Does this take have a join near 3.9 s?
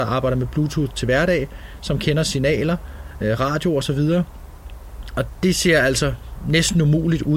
no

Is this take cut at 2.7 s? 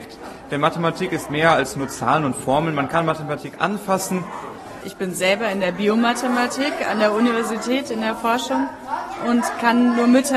no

